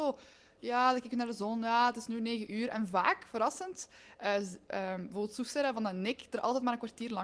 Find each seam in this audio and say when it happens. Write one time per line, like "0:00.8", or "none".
none